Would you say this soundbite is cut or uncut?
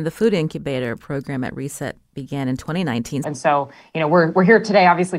cut